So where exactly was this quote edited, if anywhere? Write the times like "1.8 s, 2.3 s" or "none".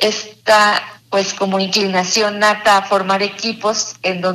1.0 s